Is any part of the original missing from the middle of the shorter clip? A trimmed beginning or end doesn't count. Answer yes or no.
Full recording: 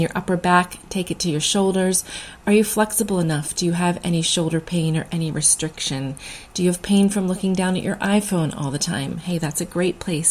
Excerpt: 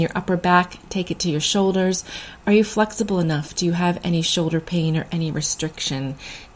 no